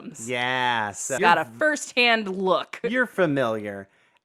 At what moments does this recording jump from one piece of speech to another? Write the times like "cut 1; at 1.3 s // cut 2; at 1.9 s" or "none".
cut 1; at 1.2 s